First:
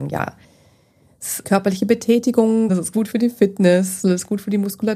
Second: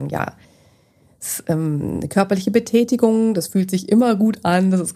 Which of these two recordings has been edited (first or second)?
first